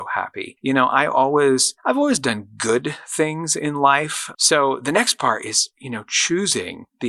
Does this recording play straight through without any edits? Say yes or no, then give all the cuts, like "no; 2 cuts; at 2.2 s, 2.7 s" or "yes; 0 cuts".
no; 1 cut; at 4.3 s